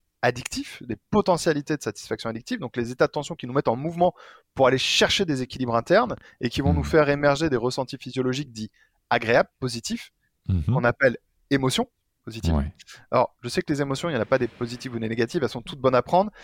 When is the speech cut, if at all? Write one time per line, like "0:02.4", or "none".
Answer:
none